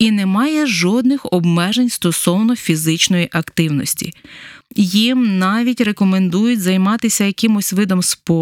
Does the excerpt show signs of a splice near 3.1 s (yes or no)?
no